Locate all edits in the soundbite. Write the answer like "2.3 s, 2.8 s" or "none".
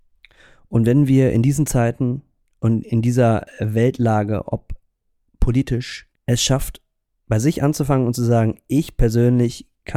6.1 s